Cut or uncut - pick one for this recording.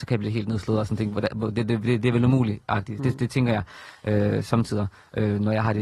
uncut